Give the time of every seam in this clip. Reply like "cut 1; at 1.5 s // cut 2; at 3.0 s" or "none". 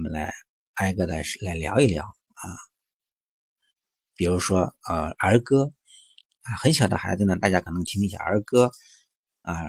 none